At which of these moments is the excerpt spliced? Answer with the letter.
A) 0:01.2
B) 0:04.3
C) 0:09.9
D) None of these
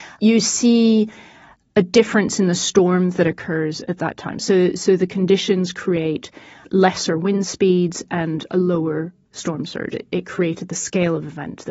C